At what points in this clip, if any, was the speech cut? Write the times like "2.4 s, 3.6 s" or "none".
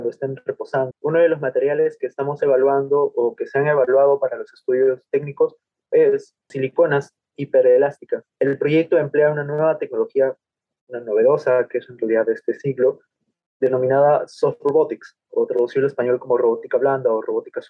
0.9 s, 8.3 s